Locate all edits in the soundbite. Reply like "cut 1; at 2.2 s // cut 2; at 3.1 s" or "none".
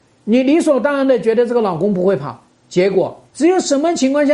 cut 1; at 3.3 s